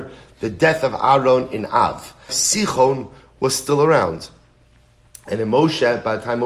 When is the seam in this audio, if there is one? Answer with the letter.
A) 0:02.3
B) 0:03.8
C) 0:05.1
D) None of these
A